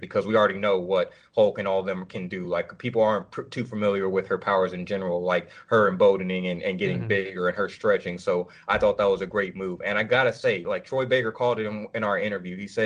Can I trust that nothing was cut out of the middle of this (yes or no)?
yes